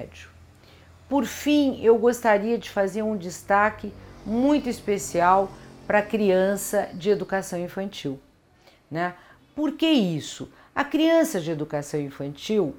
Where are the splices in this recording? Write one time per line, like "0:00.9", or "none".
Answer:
none